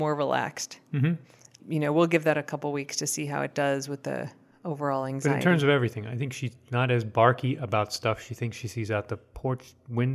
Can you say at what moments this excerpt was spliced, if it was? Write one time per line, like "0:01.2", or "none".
0:01.6